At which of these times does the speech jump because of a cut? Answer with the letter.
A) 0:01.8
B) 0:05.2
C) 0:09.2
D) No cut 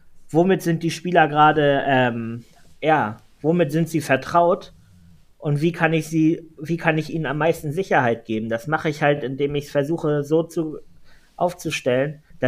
D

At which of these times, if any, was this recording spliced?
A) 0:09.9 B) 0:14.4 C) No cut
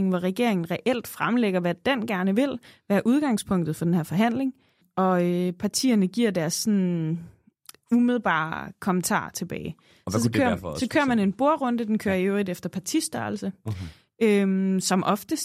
C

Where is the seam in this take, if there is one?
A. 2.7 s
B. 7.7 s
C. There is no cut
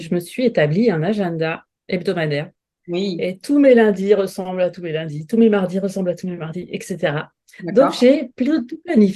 C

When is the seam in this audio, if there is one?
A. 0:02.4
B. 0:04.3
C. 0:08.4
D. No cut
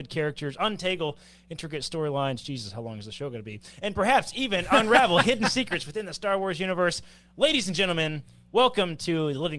D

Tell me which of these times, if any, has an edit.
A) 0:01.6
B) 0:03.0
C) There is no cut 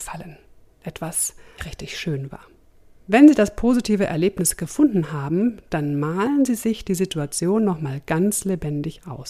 A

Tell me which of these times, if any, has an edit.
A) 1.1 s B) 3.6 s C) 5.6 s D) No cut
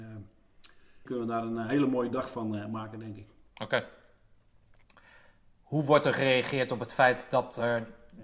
A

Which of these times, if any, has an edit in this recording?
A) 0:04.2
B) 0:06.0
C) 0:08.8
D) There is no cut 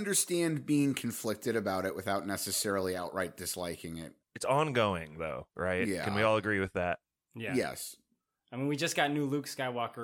A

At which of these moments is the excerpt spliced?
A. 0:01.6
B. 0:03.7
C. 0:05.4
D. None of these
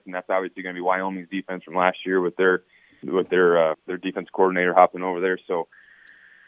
B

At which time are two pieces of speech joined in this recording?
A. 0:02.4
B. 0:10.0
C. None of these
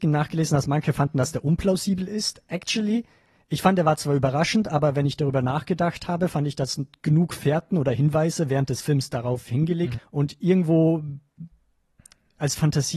B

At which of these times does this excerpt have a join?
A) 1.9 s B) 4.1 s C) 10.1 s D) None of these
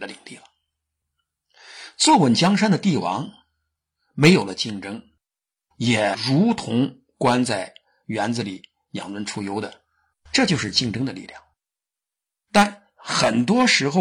C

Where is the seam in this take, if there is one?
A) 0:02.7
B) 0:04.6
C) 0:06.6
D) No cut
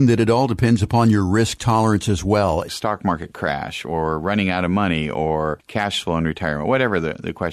A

